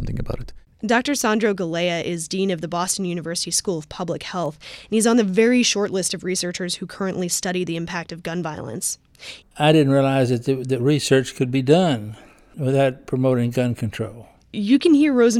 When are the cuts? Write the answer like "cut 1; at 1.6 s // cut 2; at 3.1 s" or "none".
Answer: cut 1; at 9.4 s